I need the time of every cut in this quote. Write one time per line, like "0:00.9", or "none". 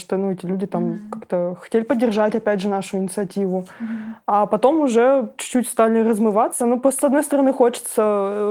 none